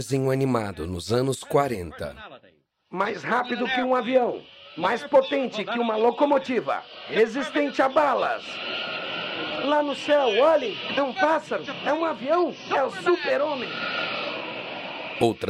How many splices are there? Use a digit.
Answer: 0